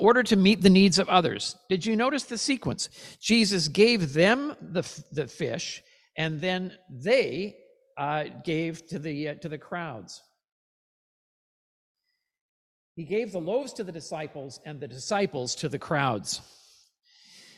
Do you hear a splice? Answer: no; 0 cuts

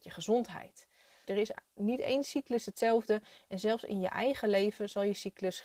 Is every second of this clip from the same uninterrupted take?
no; 1 cut; at 1.2 s

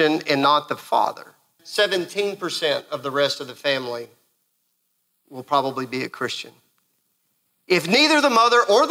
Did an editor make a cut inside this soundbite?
yes; 1 cut; at 1.6 s

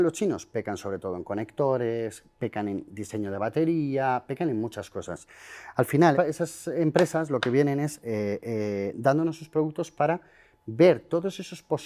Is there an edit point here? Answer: yes; 1 cut; at 6.1 s

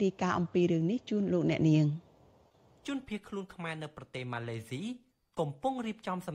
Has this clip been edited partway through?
no; 0 cuts

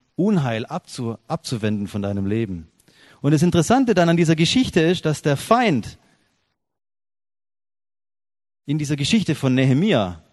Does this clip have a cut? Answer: no; 0 cuts

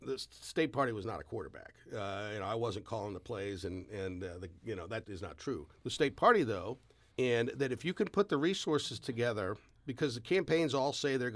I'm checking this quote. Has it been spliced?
yes; 2 cuts; at 5.0 s, 7.1 s

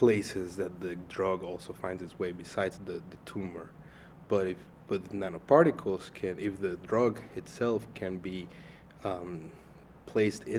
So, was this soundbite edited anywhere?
yes; 1 cut; at 2.8 s

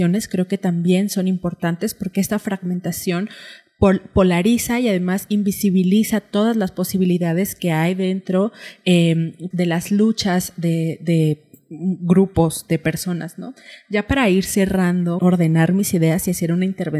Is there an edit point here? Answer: yes; 2 cuts; at 9.5 s, 15.2 s

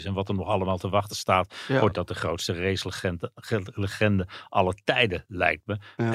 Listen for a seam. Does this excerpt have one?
no; 0 cuts

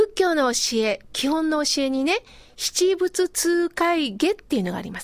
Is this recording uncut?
yes; 0 cuts

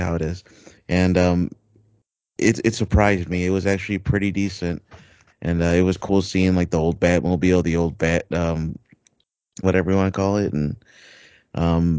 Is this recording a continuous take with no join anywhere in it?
no; 2 cuts; at 5.3 s, 9.6 s

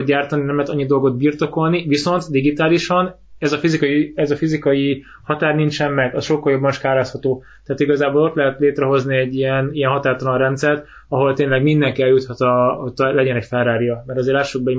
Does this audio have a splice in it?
no; 0 cuts

